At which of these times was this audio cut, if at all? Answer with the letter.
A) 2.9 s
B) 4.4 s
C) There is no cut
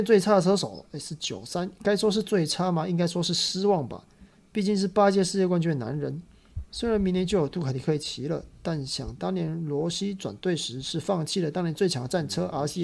C